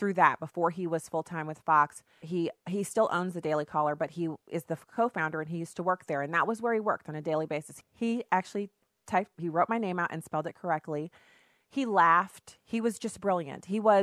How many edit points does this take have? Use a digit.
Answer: 3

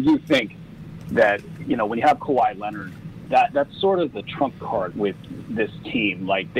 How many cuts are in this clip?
2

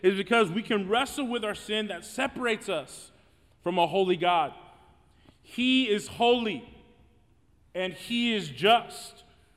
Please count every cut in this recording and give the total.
0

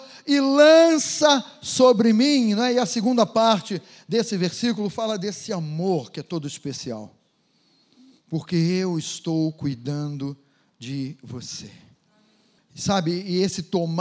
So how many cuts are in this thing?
1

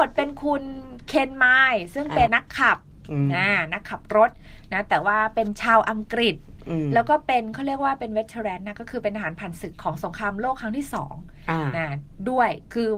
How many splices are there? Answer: 1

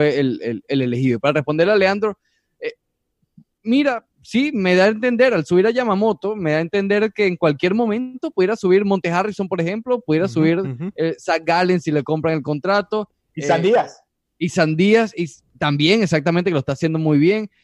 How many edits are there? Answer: 0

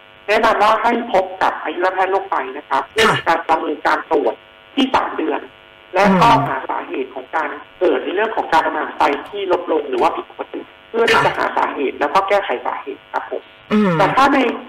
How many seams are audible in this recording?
1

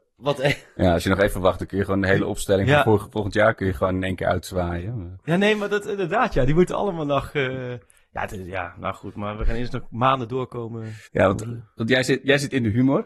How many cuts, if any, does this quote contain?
1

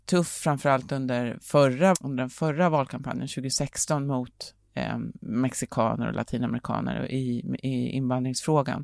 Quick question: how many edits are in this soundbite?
1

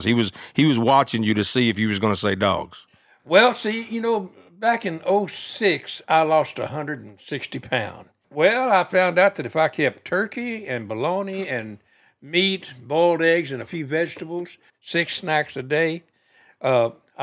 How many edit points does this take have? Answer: 3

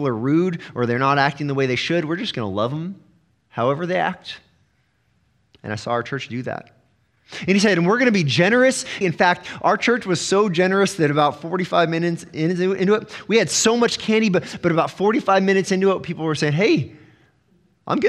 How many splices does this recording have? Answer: 1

